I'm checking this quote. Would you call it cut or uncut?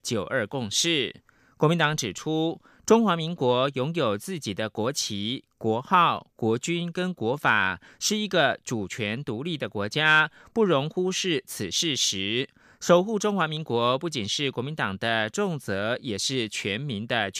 uncut